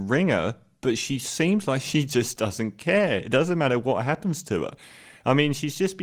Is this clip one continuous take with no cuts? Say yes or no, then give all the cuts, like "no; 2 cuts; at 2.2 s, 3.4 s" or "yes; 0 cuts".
yes; 0 cuts